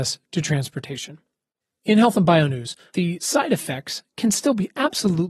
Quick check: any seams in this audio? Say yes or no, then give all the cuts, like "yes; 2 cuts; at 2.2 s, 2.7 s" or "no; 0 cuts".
yes; 1 cut; at 2.9 s